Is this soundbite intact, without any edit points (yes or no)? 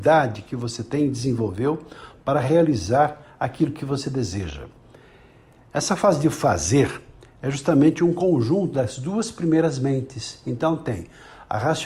yes